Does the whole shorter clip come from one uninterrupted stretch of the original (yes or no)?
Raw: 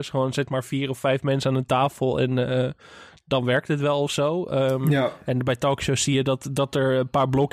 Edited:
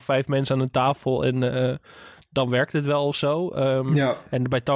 yes